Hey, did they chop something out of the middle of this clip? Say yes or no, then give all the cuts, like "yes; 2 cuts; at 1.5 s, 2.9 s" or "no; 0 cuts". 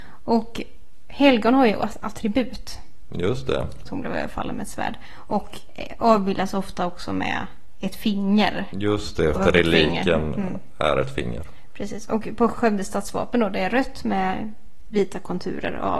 yes; 2 cuts; at 3.9 s, 9.4 s